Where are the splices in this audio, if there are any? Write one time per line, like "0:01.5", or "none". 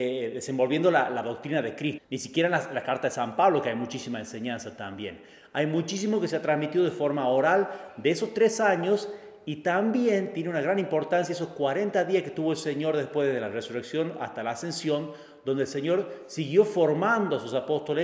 0:02.0